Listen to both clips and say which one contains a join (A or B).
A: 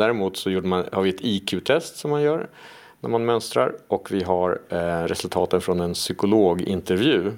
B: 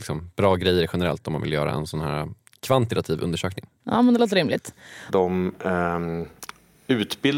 B